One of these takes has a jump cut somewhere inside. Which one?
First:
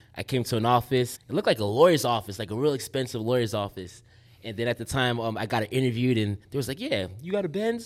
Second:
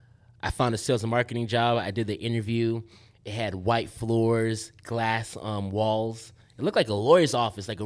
first; 1 cut; at 1.2 s

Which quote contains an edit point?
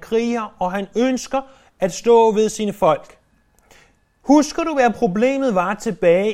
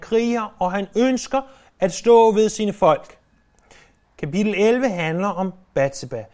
second; 1 cut; at 4.0 s

